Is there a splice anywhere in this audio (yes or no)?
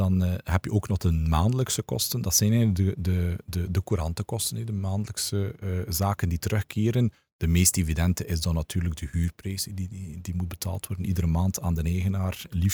no